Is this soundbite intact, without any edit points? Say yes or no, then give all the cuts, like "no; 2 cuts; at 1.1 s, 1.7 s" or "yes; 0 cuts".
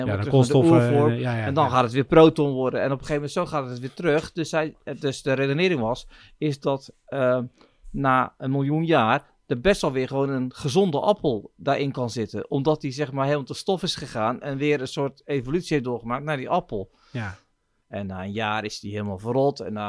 no; 1 cut; at 17.8 s